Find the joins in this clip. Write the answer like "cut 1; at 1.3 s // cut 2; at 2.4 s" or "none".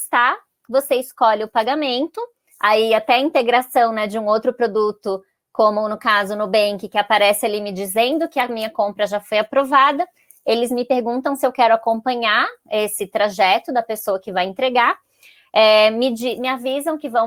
none